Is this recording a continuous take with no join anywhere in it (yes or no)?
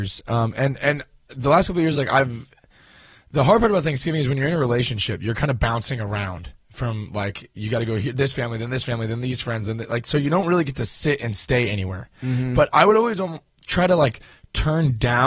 yes